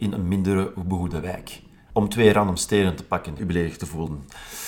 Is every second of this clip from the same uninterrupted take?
no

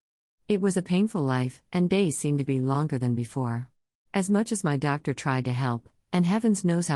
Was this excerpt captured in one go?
no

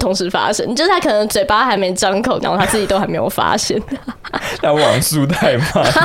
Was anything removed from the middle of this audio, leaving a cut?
yes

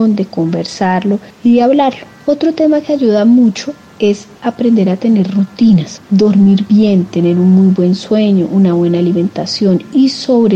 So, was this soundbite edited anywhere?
yes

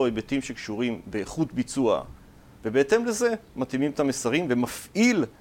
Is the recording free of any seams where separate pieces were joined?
no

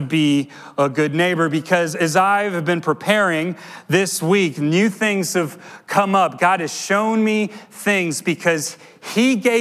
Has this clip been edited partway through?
no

